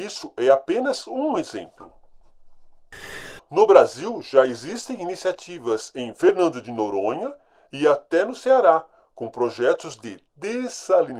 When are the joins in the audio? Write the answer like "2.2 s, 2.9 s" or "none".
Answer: 3.4 s